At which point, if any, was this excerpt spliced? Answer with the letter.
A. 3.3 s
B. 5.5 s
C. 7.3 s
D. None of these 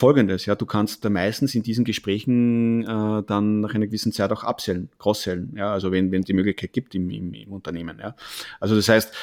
C